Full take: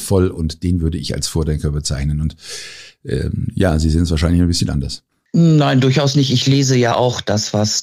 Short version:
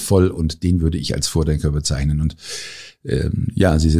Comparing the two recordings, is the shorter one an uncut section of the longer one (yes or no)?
yes